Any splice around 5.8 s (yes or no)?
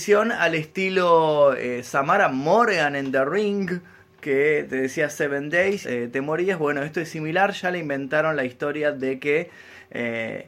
yes